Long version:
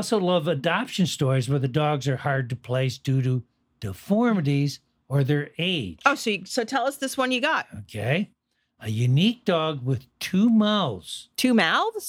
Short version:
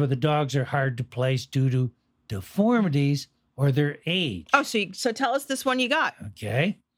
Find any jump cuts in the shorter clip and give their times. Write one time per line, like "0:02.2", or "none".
none

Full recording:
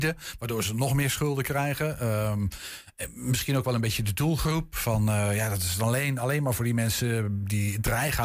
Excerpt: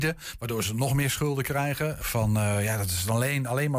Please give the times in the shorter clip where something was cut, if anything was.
0:02.0

